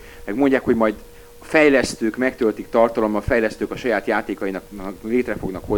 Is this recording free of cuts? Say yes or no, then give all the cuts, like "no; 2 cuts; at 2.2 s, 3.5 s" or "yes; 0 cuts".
yes; 0 cuts